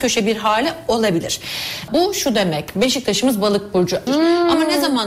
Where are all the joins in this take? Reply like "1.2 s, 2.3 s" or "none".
1.9 s, 4.1 s